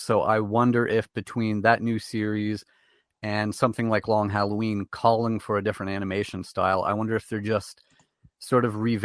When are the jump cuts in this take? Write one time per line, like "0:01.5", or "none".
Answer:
none